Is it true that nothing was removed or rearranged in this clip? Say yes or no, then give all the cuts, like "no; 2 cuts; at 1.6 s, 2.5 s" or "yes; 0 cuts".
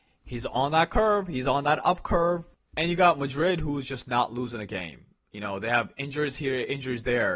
yes; 0 cuts